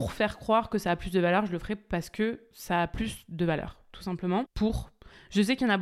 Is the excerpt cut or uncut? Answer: cut